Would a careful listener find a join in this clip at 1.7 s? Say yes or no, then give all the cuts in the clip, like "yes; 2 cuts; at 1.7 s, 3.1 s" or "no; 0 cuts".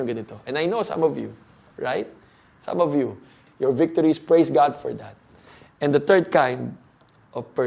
no; 1 cut; at 3.5 s